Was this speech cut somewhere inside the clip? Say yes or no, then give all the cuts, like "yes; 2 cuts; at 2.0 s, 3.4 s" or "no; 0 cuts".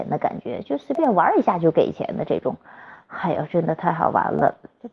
no; 0 cuts